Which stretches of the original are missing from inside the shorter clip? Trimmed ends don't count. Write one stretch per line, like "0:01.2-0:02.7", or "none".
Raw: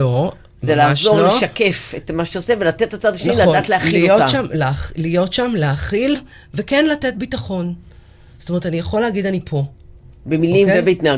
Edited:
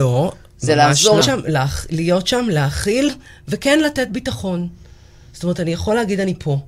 0:01.2-0:04.3